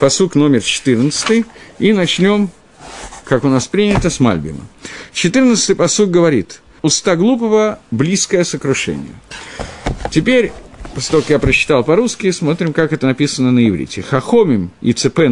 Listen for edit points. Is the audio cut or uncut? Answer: cut